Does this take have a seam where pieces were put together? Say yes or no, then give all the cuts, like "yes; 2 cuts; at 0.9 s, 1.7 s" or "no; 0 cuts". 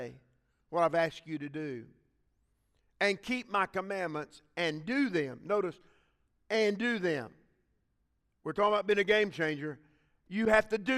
no; 0 cuts